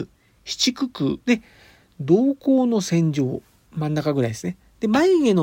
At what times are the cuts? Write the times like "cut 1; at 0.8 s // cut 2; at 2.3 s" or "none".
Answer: cut 1; at 1.2 s // cut 2; at 3.7 s